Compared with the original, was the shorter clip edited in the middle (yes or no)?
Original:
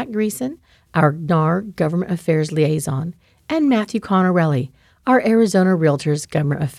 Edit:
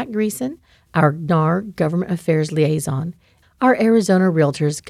yes